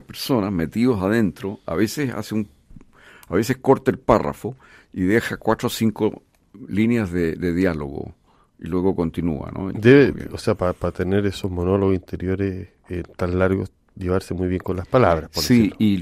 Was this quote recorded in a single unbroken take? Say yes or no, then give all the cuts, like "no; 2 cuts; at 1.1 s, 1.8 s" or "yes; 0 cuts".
no; 2 cuts; at 9.7 s, 13.9 s